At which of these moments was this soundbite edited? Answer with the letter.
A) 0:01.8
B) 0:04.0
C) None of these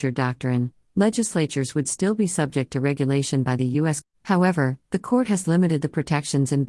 B